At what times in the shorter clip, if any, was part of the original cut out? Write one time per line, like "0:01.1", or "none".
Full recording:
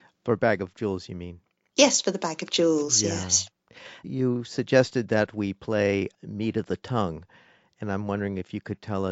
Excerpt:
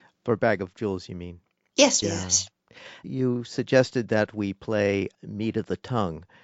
0:02.0

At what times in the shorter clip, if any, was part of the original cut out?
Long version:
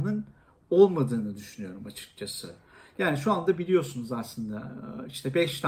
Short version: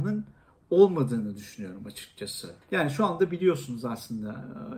0:02.6

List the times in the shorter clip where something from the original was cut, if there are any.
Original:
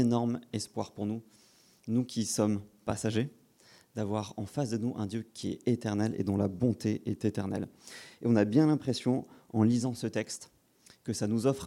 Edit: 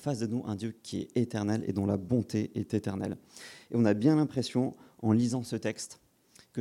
none

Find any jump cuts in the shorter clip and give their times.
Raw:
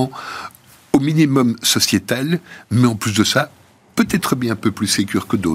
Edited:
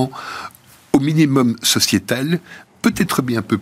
0:02.7

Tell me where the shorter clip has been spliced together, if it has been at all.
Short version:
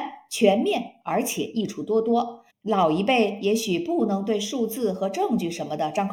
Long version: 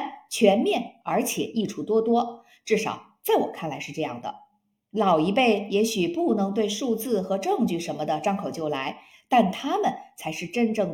0:02.5

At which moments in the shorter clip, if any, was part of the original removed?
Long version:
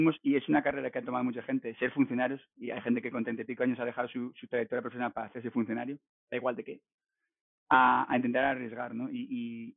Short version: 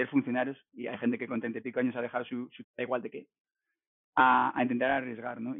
0:02.6

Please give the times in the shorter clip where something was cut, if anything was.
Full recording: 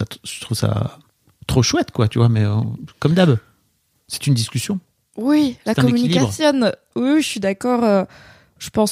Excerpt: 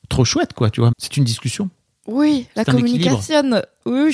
0:00.9

